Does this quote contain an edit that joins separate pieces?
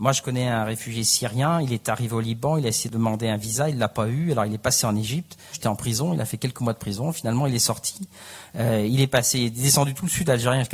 yes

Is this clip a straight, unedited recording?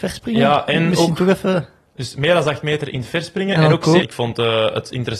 no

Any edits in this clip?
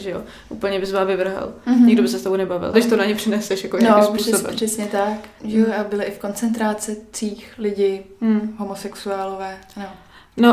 yes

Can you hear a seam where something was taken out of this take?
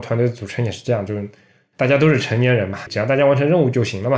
yes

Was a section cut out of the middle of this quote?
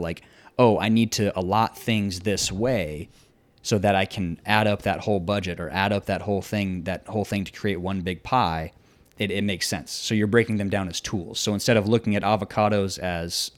no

